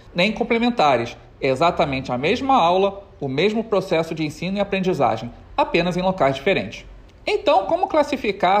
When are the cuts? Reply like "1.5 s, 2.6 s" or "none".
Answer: none

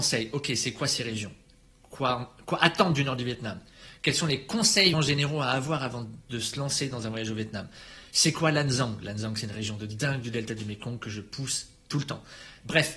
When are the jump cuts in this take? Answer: 4.9 s

